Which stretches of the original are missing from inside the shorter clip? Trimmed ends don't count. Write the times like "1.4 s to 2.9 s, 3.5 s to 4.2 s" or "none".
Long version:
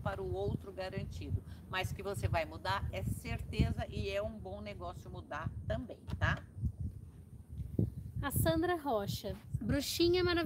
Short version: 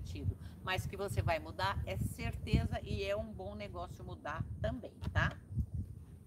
none